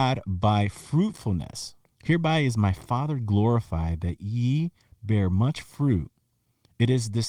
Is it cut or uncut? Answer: cut